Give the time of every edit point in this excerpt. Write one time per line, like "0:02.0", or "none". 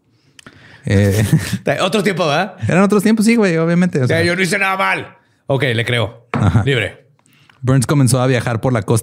none

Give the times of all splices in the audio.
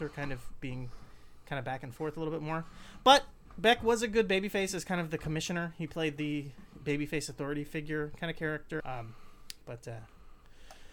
0:08.8

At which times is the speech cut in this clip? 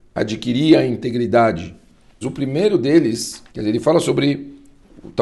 0:02.2
0:03.5

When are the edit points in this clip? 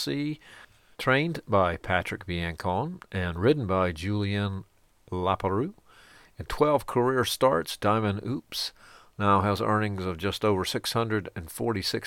0:00.9

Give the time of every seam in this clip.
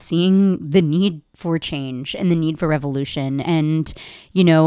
0:03.4

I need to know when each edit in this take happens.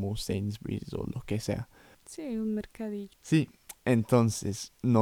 0:01.9
0:03.1

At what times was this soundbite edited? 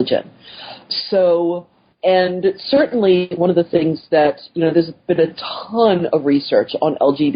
0:01.9

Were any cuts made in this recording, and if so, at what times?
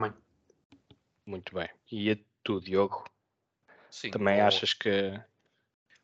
none

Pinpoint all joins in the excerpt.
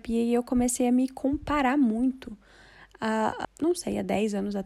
0:03.4

